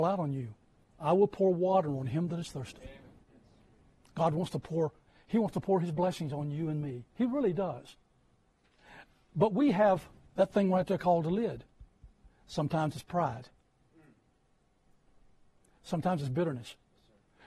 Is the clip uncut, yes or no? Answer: yes